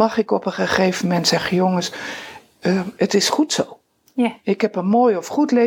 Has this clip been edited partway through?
no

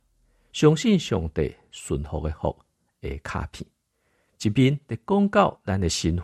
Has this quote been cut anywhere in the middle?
no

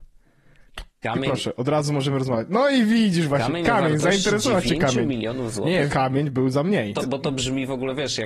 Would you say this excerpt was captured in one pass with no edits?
no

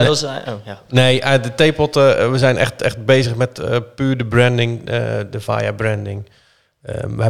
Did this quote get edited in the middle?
no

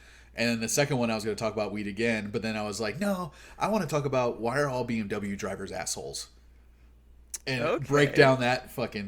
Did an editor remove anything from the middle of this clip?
no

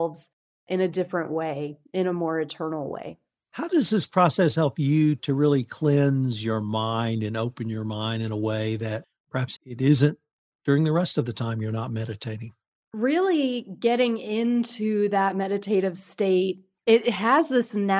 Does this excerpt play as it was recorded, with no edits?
no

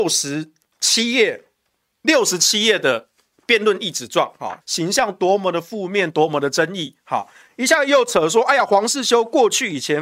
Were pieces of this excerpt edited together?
yes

